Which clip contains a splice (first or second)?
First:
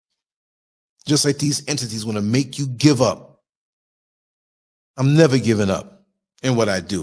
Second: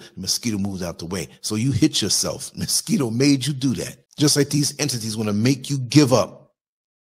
second